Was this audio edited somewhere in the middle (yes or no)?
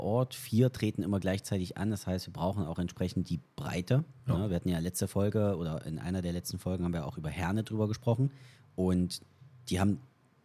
no